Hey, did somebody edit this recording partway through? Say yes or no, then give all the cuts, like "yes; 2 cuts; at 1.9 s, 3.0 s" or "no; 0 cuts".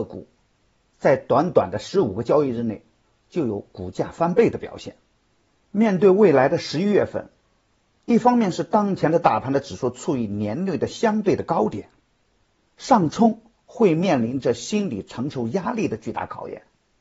no; 0 cuts